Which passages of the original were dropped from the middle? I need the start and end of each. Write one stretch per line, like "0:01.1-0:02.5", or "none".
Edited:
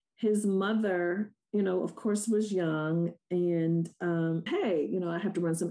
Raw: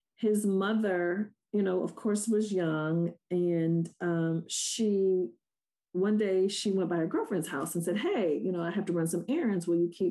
0:04.5-0:08.0